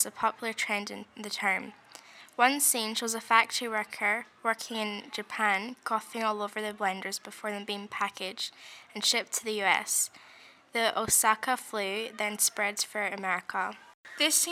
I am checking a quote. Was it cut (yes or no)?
no